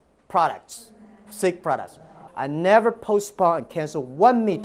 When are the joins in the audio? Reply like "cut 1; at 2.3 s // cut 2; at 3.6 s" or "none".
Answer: cut 1; at 2.3 s